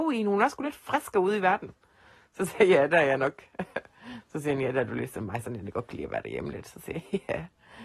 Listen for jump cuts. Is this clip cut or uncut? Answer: uncut